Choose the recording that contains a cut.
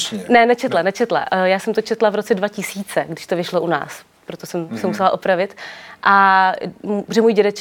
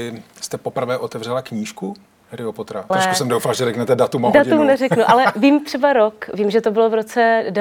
second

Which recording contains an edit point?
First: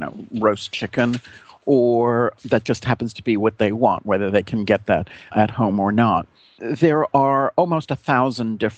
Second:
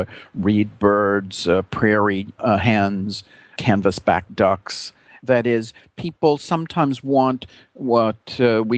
second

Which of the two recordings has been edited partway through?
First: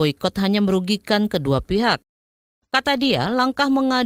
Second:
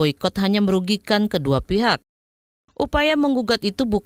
second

